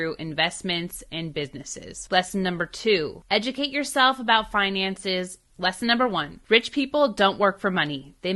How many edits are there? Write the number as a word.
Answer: one